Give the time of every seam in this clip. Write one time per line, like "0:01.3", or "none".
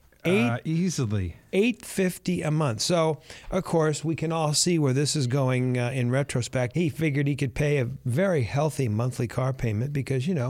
0:06.7